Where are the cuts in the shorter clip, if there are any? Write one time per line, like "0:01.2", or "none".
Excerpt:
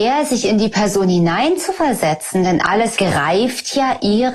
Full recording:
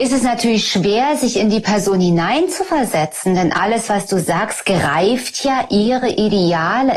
0:03.0